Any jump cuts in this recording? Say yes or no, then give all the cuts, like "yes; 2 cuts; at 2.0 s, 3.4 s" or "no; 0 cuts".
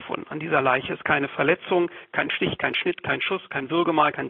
no; 0 cuts